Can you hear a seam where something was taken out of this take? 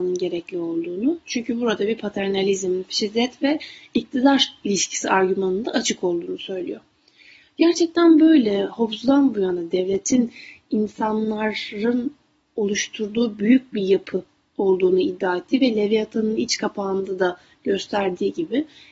no; 0 cuts

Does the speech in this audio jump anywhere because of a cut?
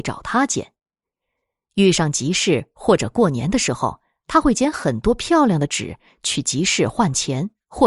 no; 0 cuts

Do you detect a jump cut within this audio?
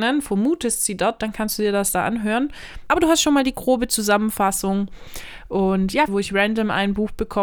yes; 2 cuts; at 2.9 s, 6.1 s

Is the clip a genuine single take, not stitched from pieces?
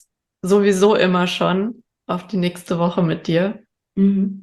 yes; 0 cuts

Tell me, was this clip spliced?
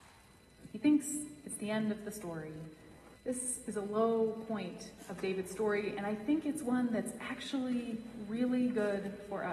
yes; 1 cut; at 3.2 s

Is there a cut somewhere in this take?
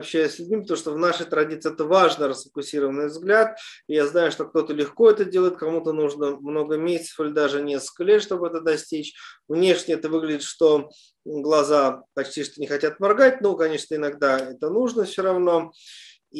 no; 0 cuts

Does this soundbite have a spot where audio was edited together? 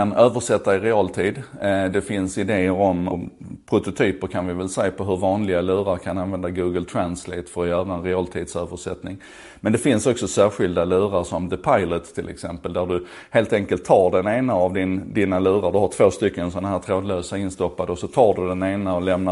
yes; 1 cut; at 3.1 s

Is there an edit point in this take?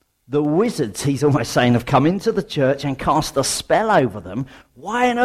no; 0 cuts

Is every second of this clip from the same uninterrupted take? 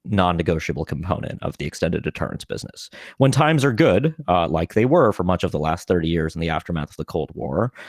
yes; 0 cuts

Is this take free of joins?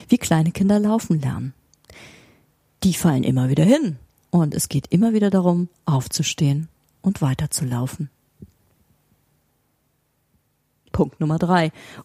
yes; 0 cuts

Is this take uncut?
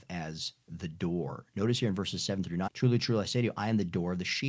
no; 1 cut; at 2.7 s

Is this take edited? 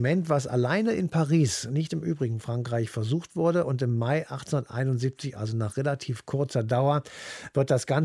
no; 0 cuts

